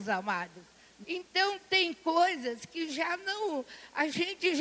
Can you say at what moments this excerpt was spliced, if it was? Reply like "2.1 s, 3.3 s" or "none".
1.0 s